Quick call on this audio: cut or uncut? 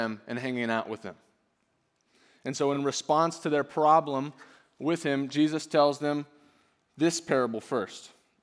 uncut